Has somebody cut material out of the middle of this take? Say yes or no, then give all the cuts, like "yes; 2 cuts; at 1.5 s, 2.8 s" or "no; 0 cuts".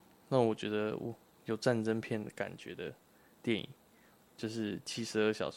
no; 0 cuts